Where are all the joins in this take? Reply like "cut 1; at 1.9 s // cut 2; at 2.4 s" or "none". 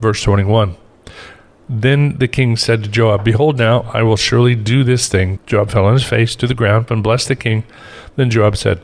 cut 1; at 5.4 s // cut 2; at 6.9 s

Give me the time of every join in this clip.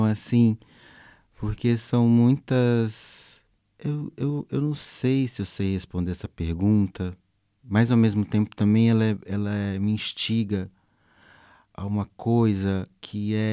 none

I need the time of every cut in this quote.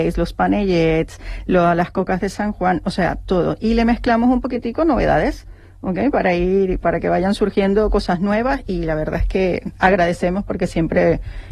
none

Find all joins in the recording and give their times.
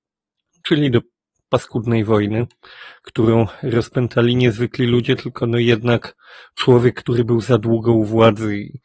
none

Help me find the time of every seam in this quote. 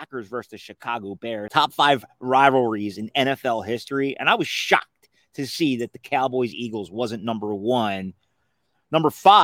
cut 1; at 1.5 s

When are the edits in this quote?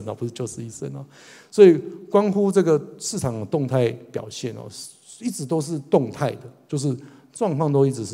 none

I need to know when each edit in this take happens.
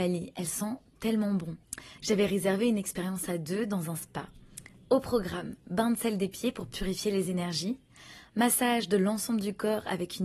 cut 1; at 2.0 s

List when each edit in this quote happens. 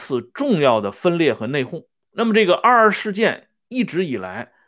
cut 1; at 2.1 s

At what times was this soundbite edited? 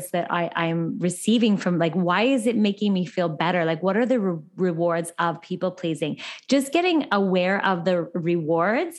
none

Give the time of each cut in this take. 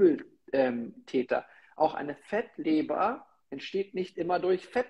none

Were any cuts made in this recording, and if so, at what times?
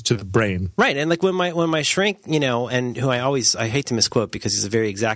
none

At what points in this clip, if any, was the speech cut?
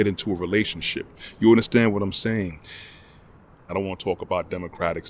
cut 1; at 3.7 s

